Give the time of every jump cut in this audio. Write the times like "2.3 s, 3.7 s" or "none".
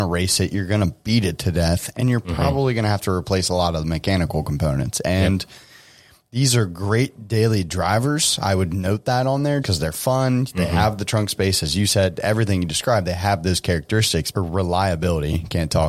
9.6 s, 14.3 s